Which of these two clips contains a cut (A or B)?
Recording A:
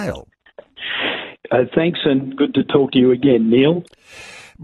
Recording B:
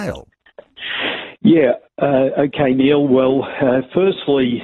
A